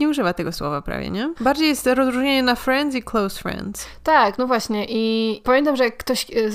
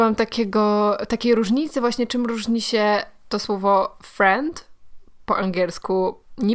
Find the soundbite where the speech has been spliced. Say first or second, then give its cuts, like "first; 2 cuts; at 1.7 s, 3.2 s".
first; 1 cut; at 1.4 s